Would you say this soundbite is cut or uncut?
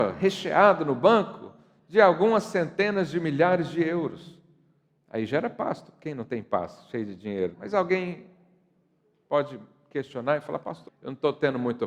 cut